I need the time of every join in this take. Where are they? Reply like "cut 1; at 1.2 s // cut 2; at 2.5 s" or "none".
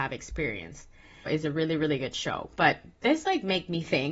cut 1; at 1.3 s